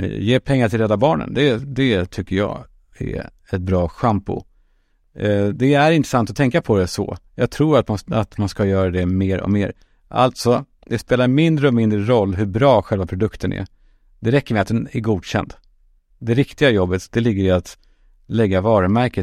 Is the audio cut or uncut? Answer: uncut